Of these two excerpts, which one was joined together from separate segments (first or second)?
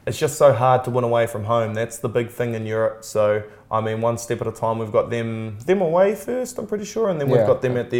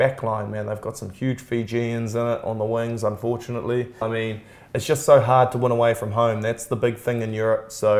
second